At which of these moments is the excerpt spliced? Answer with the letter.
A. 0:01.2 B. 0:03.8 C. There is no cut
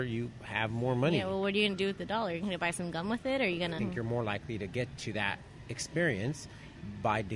B